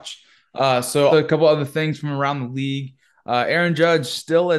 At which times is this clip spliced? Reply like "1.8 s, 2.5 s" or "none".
1.1 s